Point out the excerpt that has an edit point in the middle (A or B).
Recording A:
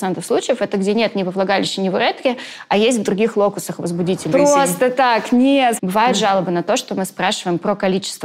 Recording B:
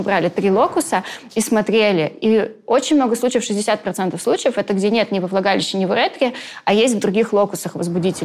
A